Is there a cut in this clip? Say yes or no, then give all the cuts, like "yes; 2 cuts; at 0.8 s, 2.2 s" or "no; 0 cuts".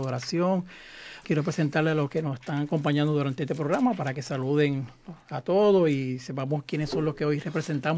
yes; 1 cut; at 1.2 s